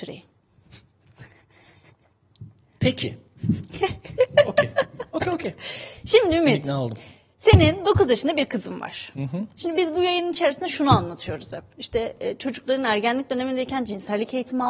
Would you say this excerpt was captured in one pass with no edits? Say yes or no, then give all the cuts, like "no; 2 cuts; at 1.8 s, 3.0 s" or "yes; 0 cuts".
yes; 0 cuts